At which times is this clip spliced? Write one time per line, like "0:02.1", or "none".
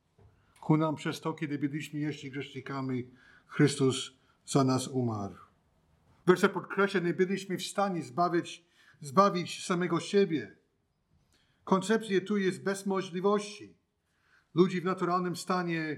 0:06.2